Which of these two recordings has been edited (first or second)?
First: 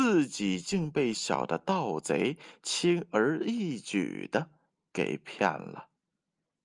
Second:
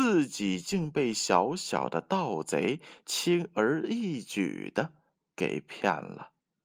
first